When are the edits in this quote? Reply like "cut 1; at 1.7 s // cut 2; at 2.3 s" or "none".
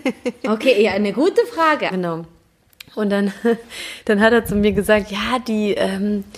cut 1; at 1.9 s